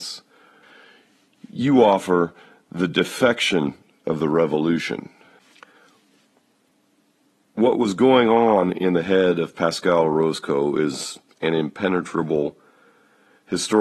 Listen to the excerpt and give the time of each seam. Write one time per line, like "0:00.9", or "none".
none